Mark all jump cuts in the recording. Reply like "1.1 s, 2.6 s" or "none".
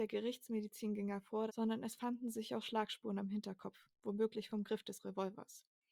1.5 s